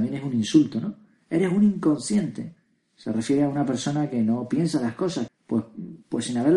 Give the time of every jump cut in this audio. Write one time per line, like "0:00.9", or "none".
0:05.3